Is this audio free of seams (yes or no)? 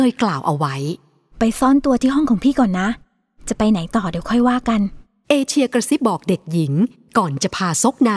no